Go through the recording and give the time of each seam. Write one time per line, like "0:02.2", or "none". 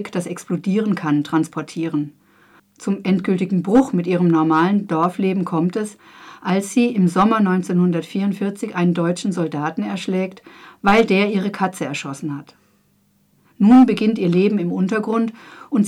0:02.6